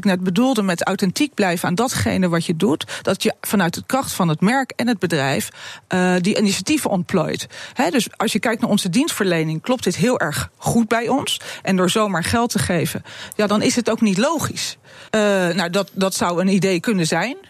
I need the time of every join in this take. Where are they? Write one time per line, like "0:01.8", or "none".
0:15.1